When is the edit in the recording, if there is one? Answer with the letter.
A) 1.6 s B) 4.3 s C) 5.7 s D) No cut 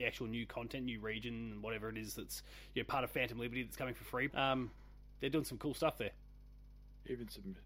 B